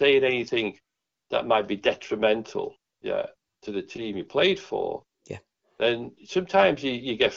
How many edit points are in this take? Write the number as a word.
zero